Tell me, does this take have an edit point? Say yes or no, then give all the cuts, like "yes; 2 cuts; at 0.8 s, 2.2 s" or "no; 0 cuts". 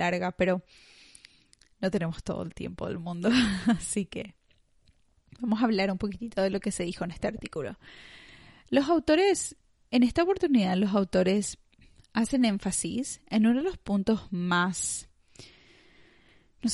no; 0 cuts